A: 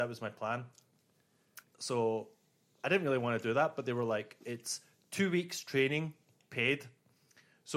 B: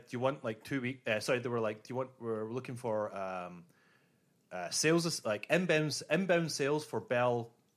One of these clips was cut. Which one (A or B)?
A